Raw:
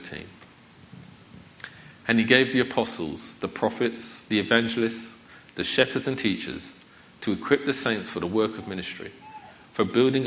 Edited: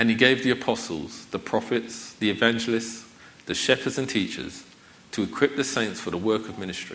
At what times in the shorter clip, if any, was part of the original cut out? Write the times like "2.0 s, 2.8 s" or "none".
none